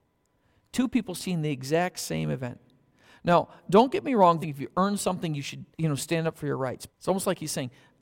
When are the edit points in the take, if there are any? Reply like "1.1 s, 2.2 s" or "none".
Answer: 4.4 s, 5.7 s, 6.9 s